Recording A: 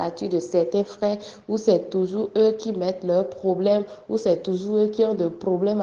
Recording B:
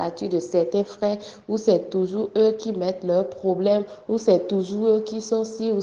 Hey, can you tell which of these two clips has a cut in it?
B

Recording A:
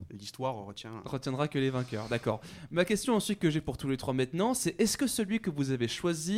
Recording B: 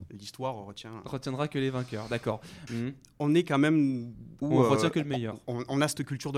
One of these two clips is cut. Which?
B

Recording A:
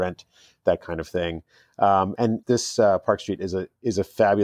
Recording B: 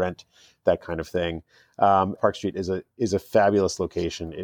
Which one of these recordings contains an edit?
B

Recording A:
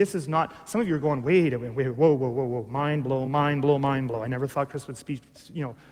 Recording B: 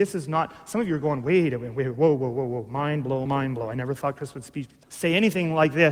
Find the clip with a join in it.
B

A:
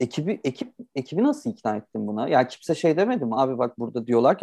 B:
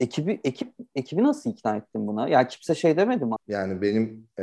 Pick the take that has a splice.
B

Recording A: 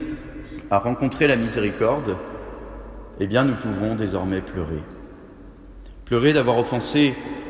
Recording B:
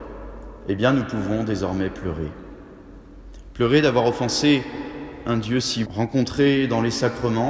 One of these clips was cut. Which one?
B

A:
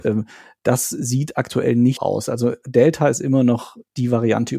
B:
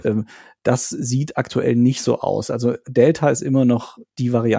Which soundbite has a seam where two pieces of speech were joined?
A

